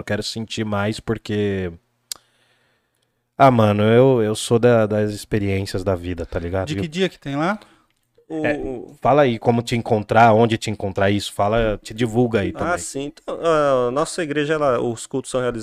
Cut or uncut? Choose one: uncut